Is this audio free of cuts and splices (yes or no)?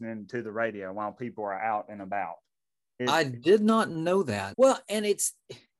no